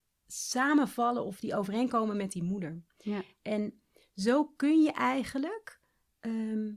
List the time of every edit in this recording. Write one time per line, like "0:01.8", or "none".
none